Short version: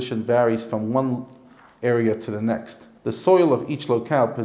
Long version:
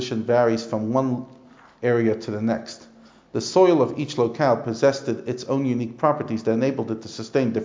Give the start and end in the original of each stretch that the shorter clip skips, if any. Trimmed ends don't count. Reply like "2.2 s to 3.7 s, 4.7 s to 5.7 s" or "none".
3.0 s to 3.3 s